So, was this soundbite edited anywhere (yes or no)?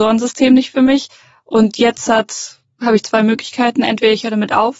no